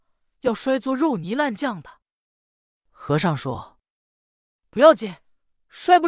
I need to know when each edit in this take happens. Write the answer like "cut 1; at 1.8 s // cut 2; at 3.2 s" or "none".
none